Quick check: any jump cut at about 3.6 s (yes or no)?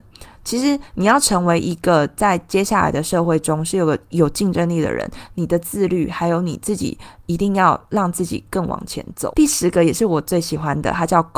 no